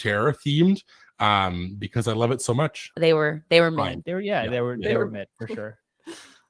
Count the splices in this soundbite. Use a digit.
1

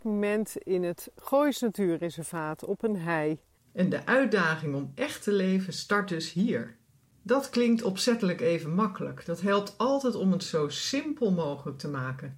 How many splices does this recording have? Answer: 1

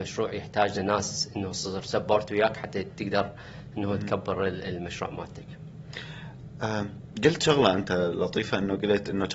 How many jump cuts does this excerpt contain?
0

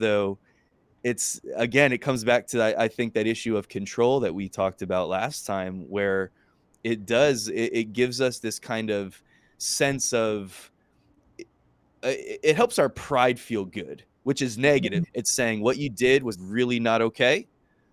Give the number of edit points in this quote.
2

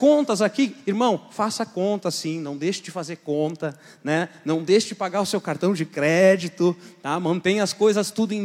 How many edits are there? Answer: 0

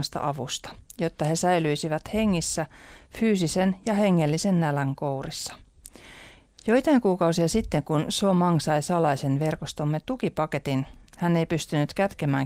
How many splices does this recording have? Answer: 0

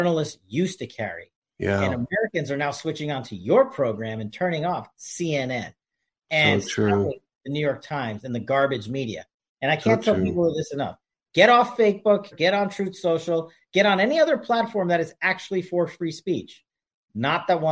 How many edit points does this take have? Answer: 1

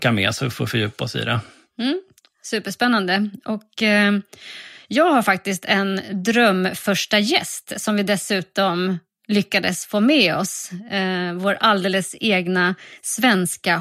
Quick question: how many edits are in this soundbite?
0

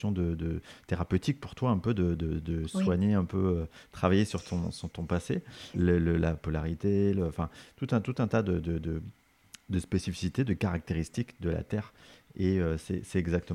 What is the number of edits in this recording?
1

